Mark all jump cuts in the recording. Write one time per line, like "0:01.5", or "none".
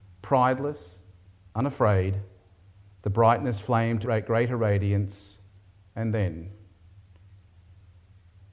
0:04.0